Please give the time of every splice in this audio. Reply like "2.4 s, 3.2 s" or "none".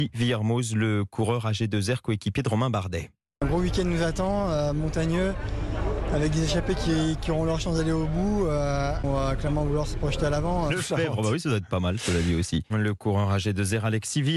10.7 s, 12.7 s

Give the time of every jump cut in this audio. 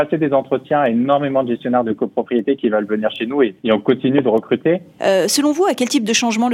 3.6 s, 5.0 s

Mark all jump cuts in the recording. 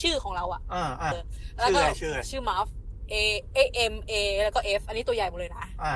1.1 s

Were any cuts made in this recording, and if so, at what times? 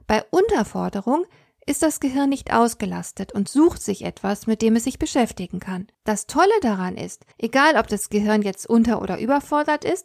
5.9 s, 7.3 s

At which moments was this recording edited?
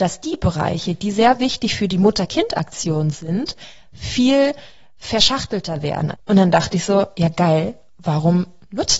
6.1 s

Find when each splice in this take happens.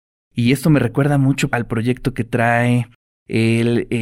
1.5 s

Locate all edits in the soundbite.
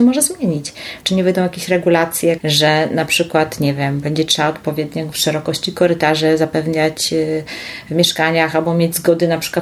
1.0 s, 2.4 s

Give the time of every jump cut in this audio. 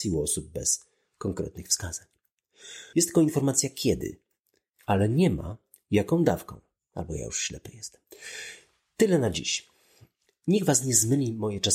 2.9 s

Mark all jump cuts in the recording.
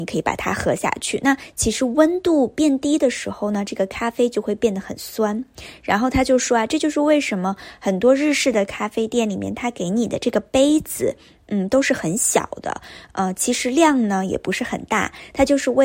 none

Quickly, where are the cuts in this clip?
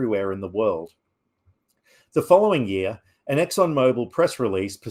none

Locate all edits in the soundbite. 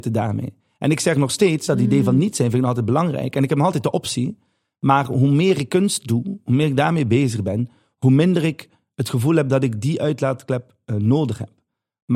1.7 s

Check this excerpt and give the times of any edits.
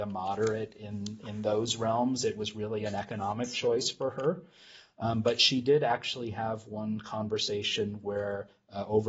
none

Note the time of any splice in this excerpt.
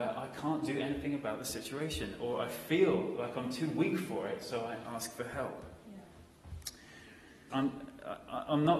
7.5 s

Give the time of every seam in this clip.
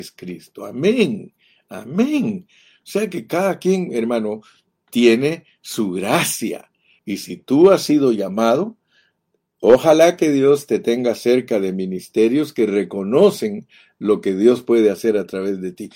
7.0 s

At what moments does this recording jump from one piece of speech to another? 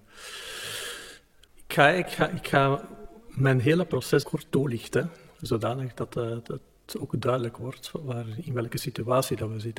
4.2 s

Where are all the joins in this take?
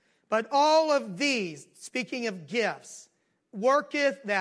none

